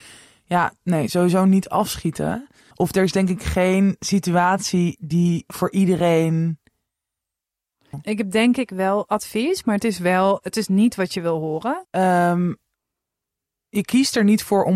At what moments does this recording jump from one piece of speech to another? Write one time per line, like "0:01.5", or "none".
0:02.7
0:07.9
0:11.8